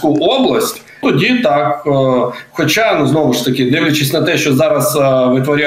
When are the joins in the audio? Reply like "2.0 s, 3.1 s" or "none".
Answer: 1.0 s